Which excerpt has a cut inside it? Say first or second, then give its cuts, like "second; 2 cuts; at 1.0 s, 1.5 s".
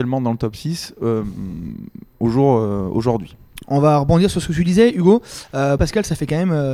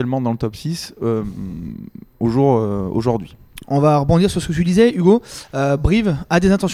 first; 1 cut; at 5.8 s